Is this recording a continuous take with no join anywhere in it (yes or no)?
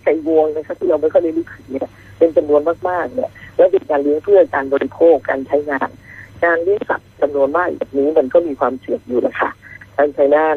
yes